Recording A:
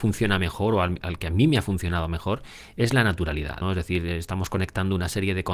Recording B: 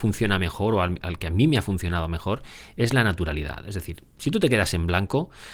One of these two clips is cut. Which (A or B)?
A